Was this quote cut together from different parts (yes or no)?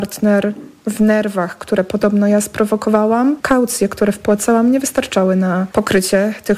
yes